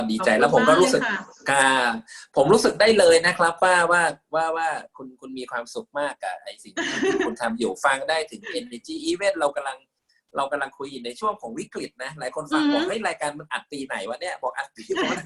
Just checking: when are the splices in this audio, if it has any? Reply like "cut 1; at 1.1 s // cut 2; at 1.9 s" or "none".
none